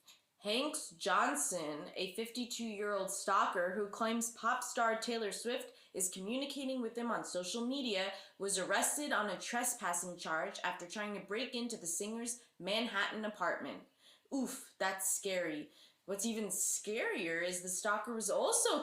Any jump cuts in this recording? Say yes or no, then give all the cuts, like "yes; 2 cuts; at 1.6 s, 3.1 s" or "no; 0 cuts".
no; 0 cuts